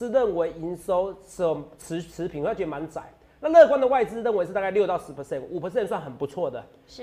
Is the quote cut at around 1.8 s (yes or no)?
no